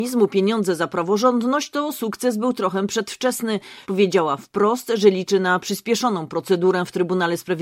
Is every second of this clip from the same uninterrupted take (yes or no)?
no